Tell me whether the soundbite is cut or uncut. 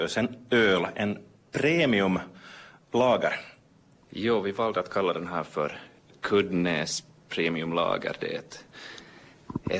cut